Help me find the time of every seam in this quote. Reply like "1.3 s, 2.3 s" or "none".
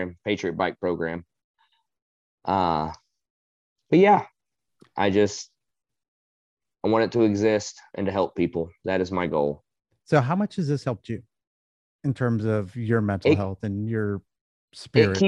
none